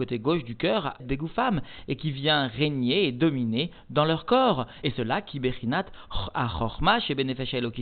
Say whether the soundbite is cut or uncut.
cut